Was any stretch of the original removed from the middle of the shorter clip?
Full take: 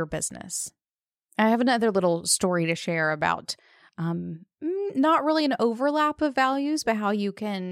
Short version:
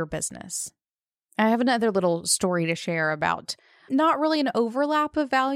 yes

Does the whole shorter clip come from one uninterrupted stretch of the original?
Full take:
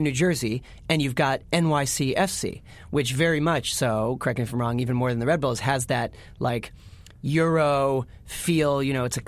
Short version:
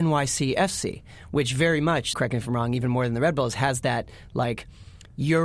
no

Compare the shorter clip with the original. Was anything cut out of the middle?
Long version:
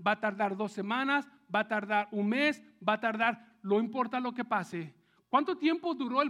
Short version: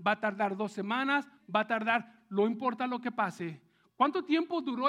yes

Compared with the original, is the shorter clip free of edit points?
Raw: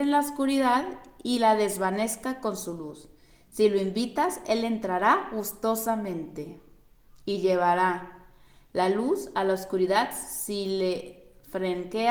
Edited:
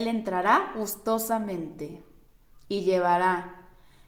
yes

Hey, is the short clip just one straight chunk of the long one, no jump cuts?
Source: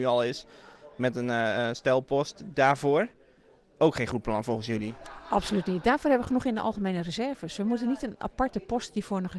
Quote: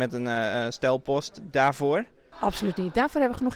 no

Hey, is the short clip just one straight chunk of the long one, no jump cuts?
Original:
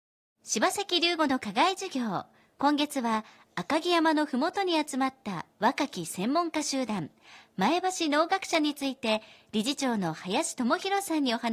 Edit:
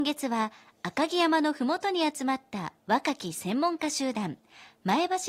yes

